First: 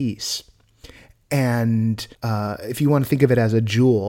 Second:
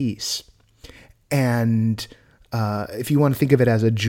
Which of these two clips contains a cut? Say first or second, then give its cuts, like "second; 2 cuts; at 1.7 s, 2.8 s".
first; 1 cut; at 2.1 s